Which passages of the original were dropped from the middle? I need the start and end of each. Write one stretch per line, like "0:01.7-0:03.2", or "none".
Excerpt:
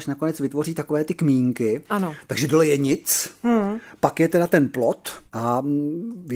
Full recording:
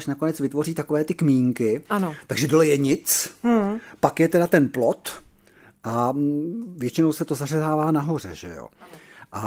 0:05.3-0:05.8